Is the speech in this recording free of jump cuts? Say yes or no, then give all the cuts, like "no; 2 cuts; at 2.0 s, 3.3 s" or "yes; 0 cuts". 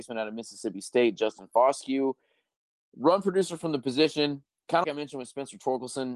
no; 1 cut; at 4.8 s